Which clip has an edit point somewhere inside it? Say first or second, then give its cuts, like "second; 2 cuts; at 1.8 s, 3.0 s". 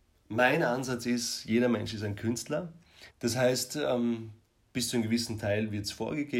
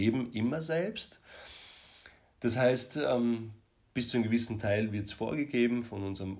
first; 1 cut; at 3.1 s